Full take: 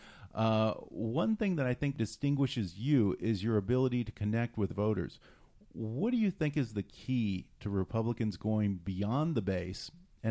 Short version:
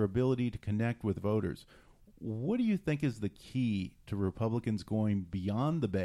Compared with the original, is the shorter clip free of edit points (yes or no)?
yes